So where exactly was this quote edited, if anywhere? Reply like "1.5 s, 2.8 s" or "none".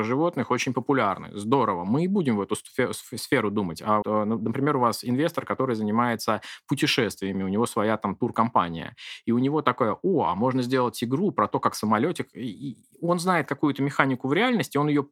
4.0 s